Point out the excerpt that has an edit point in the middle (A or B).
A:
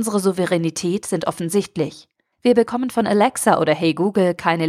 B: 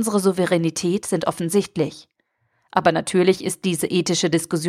A